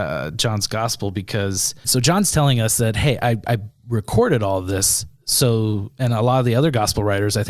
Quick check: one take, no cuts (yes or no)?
no